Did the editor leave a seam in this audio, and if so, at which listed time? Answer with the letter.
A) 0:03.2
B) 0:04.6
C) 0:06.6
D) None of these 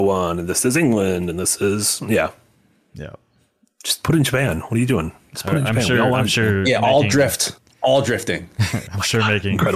D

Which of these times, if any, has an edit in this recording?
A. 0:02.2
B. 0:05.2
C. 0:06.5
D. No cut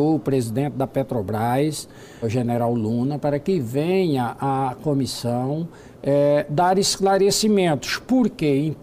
A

